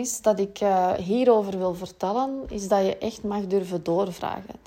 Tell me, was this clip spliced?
no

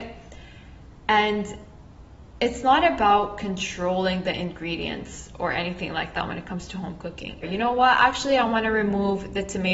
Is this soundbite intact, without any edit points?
no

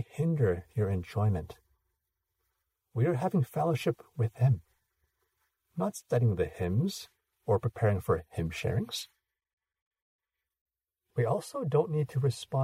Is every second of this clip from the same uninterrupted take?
yes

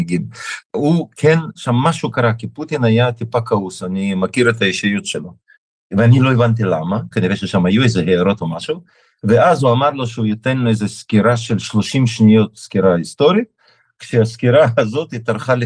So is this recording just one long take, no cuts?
no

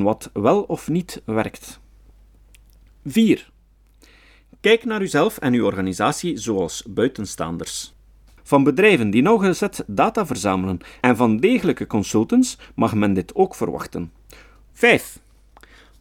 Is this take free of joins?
no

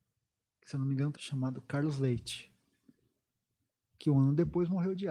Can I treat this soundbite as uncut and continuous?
no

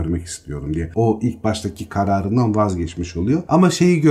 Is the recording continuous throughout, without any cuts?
yes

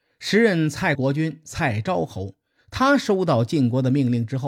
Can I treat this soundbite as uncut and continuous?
no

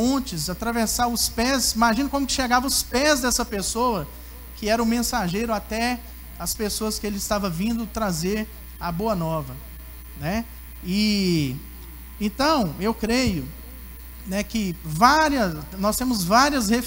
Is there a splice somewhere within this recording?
no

